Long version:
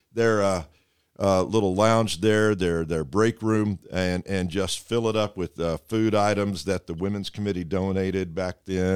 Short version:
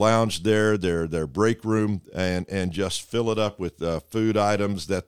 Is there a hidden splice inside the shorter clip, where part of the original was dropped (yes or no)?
no